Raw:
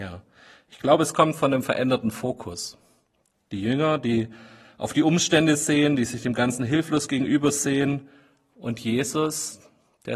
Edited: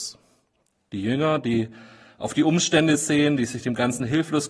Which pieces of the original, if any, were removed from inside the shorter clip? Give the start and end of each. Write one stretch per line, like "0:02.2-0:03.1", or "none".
none